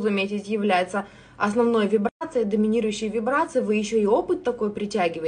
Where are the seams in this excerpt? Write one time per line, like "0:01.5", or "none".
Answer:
none

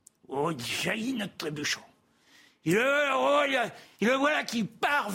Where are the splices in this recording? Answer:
none

